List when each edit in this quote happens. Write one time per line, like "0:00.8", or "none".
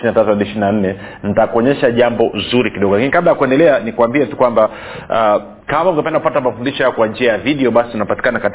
0:05.6